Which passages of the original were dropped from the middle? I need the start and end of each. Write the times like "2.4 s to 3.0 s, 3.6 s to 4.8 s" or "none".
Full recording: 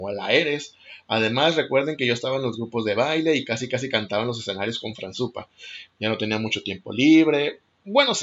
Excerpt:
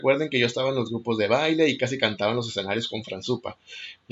3.4 s to 3.7 s